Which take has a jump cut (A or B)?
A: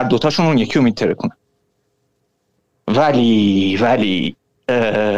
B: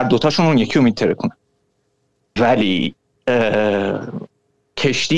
B